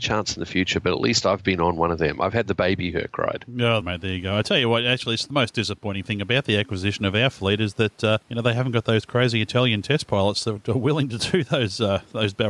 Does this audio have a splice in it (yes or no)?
yes